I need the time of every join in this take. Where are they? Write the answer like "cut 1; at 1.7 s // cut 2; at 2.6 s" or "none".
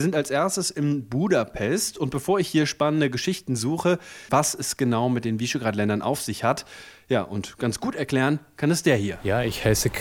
cut 1; at 4.3 s